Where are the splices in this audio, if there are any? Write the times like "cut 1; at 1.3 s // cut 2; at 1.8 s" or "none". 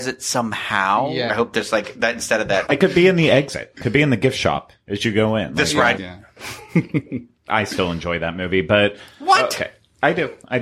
cut 1; at 1.3 s // cut 2; at 2.7 s // cut 3; at 6.0 s